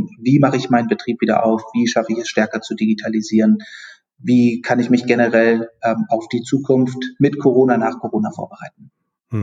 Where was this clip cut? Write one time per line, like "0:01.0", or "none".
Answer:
none